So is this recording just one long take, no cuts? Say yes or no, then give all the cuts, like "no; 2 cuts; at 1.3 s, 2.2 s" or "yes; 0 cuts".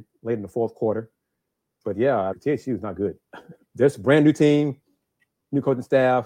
no; 2 cuts; at 2.3 s, 3.7 s